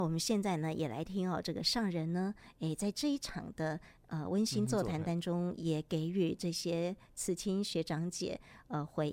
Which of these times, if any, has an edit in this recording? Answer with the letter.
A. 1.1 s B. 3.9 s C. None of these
A